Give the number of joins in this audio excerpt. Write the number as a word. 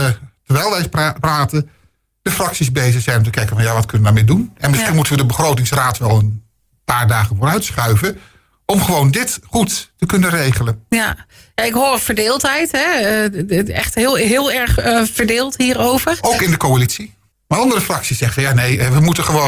one